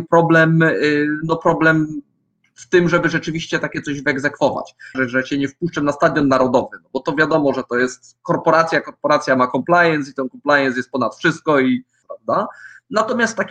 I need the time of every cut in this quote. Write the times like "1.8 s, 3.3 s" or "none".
4.9 s, 12.0 s